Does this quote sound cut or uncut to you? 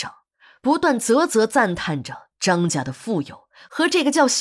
uncut